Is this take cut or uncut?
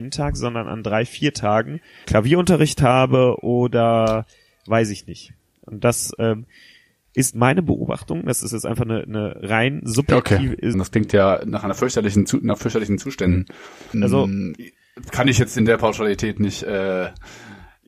cut